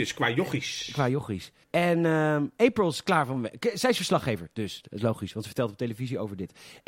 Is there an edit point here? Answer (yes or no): yes